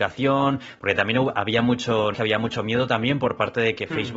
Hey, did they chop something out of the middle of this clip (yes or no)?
yes